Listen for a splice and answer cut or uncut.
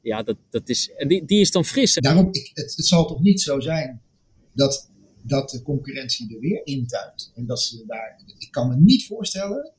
cut